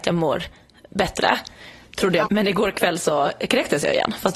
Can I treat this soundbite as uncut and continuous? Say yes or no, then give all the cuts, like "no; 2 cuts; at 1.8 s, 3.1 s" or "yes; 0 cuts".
no; 1 cut; at 2.3 s